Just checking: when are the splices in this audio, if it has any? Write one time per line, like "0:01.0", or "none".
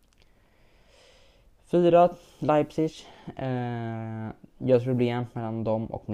none